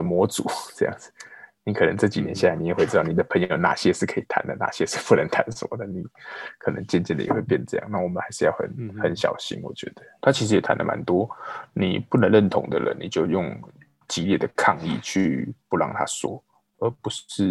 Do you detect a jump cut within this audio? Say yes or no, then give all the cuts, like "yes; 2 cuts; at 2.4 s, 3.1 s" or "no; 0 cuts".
no; 0 cuts